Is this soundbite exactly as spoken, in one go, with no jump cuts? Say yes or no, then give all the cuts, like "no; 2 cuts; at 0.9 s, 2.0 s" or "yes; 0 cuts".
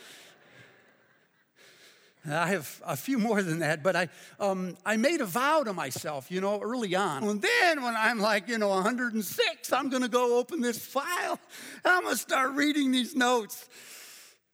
no; 1 cut; at 7.2 s